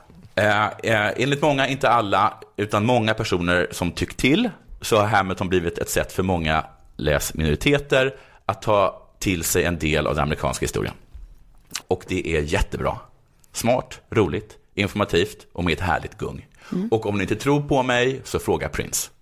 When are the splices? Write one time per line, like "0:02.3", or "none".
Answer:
0:11.8

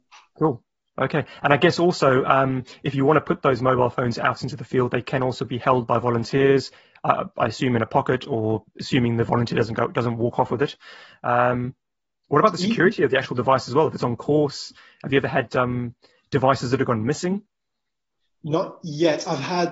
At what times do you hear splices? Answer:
0:08.7

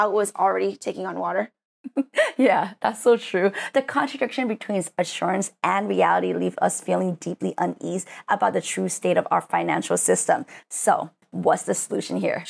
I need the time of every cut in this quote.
none

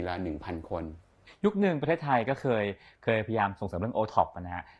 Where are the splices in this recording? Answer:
none

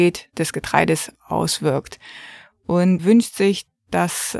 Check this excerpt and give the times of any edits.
0:03.0

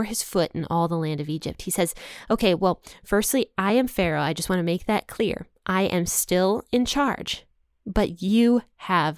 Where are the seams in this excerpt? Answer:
none

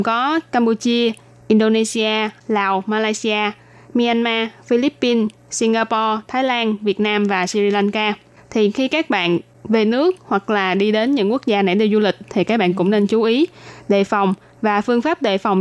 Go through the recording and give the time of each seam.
none

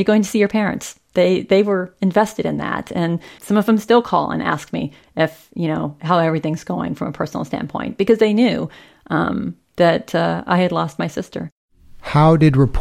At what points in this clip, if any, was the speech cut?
0:03.4

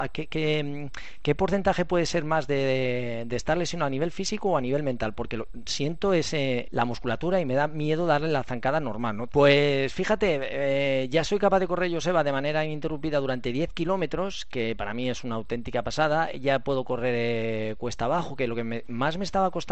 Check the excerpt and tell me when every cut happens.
0:06.6
0:09.3

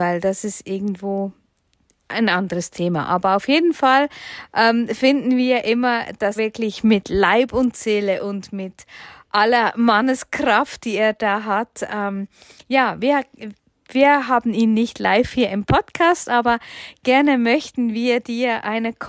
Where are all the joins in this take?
0:06.4

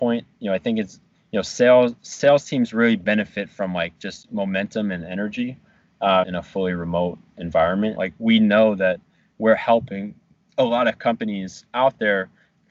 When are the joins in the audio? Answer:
0:06.2
0:08.0

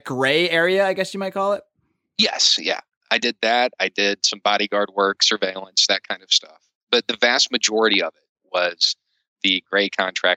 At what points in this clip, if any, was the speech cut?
none

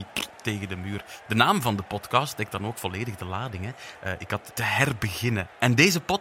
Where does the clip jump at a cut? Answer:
0:04.5

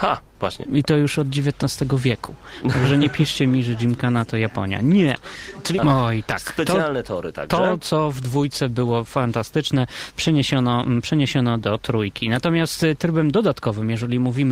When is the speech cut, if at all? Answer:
0:05.8

